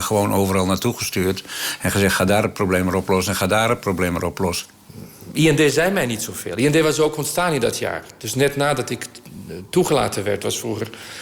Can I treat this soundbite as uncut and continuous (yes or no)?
yes